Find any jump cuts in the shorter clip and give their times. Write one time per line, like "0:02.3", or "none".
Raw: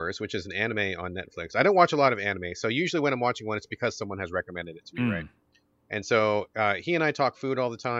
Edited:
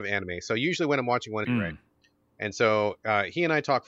0:01.4